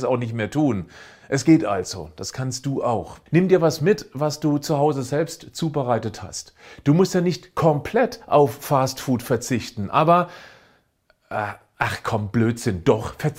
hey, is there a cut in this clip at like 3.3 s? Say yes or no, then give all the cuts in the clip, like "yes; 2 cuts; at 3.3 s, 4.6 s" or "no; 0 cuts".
yes; 1 cut; at 3.3 s